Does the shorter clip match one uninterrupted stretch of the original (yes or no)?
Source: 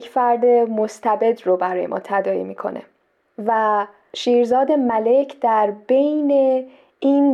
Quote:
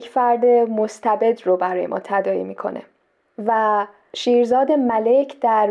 yes